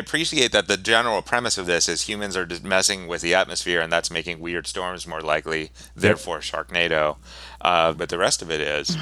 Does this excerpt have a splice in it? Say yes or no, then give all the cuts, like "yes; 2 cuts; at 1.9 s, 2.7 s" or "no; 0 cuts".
yes; 1 cut; at 7.9 s